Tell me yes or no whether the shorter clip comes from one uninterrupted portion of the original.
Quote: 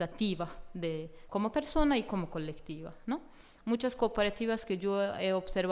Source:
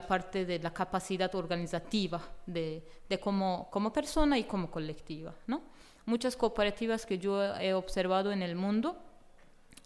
no